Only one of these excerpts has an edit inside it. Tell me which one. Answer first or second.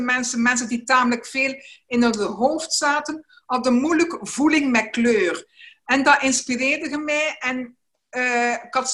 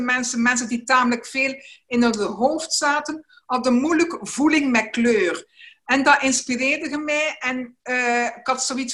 second